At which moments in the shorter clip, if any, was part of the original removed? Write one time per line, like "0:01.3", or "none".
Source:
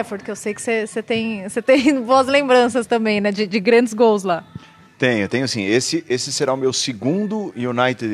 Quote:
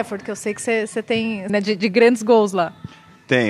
0:01.5